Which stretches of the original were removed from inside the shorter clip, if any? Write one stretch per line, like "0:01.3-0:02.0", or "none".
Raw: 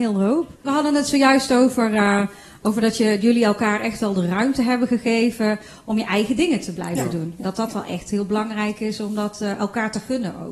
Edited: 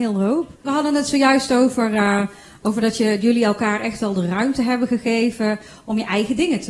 none